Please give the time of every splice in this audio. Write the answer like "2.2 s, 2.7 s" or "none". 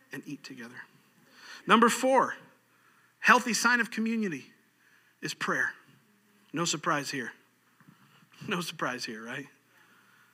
none

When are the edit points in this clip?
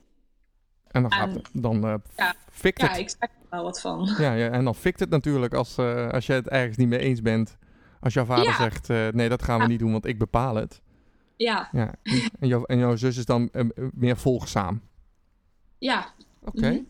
none

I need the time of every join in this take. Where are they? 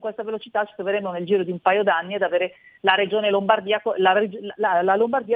none

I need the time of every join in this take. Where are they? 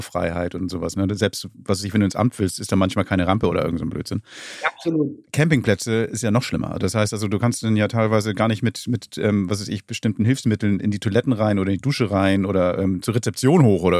0.9 s

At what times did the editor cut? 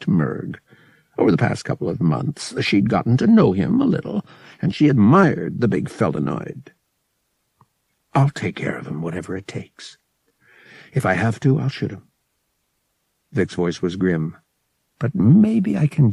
none

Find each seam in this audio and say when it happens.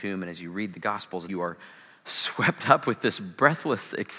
1.3 s

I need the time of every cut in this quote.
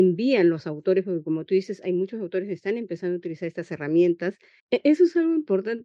4.6 s

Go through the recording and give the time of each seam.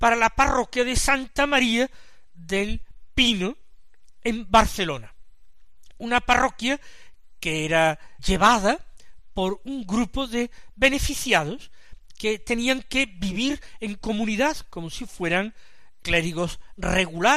8.2 s, 16.0 s

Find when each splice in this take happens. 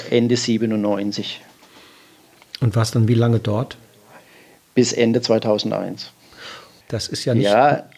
6.8 s

